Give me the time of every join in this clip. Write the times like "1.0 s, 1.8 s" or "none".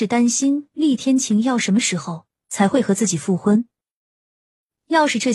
none